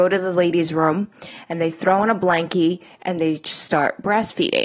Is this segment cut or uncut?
uncut